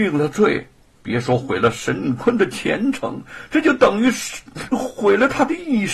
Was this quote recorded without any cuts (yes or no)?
yes